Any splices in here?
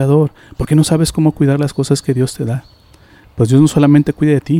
no; 0 cuts

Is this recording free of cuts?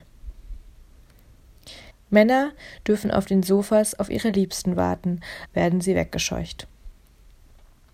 no; 2 cuts; at 1.9 s, 5.5 s

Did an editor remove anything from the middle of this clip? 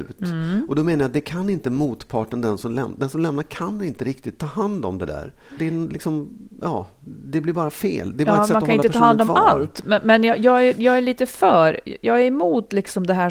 yes; 1 cut; at 5.6 s

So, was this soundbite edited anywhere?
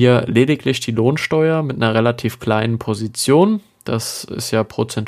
no; 0 cuts

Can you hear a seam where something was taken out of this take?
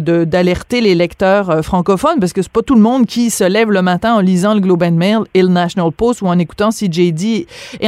no; 0 cuts

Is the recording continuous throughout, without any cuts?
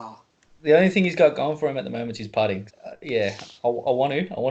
no; 1 cut; at 2.7 s

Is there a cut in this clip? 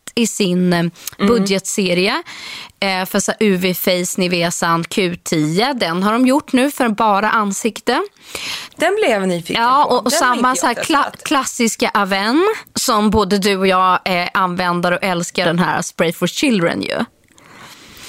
yes; 3 cuts; at 5.7 s, 8.7 s, 15.4 s

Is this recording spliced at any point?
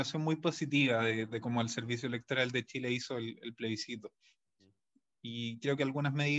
no; 0 cuts

